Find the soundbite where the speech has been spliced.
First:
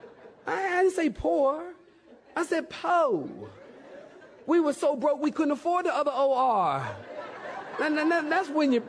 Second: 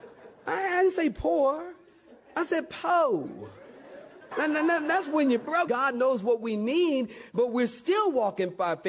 second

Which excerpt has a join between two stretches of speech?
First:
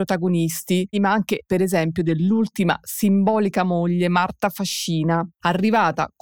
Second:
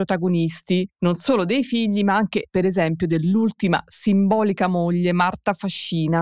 first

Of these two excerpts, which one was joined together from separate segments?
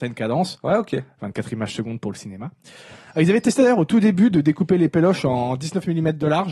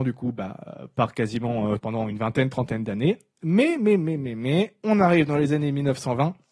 second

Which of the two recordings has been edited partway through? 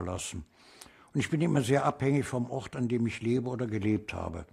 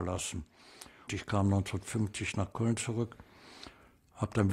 second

